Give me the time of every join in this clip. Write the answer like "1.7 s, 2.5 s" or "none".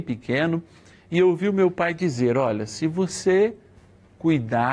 none